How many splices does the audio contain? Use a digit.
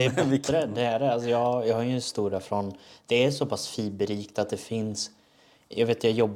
0